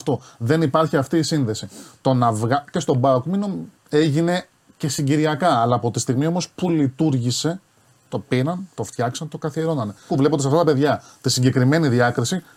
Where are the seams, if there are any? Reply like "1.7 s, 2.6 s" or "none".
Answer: 3.7 s, 10.1 s